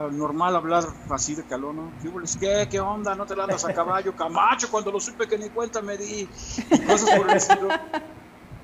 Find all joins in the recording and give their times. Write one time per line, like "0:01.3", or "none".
none